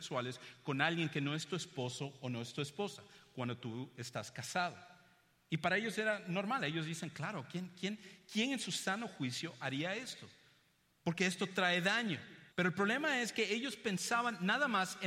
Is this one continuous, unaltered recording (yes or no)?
no